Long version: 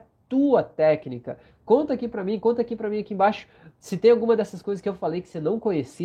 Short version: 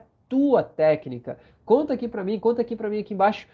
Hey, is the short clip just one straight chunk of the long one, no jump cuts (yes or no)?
yes